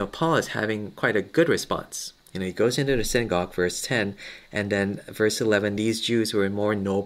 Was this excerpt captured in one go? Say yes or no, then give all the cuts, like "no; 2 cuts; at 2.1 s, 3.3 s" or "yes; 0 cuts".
yes; 0 cuts